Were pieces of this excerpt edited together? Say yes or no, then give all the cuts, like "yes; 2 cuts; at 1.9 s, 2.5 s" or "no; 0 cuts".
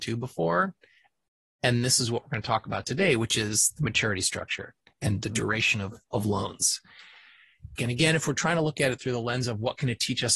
yes; 1 cut; at 7.8 s